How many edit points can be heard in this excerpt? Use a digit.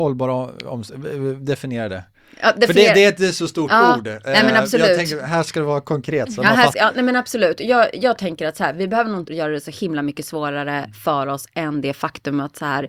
2